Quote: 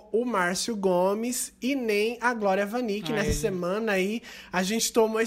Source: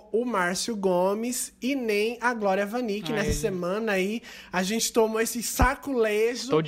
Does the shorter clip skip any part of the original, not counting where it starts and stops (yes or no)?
no